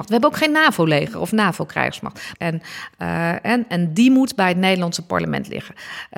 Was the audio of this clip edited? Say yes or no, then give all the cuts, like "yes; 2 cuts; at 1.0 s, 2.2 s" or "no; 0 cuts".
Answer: yes; 1 cut; at 2.3 s